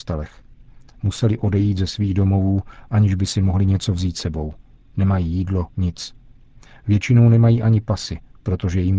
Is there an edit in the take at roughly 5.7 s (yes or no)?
yes